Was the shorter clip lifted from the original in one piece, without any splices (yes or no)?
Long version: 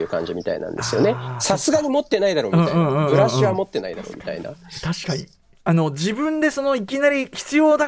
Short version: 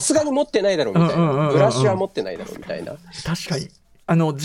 yes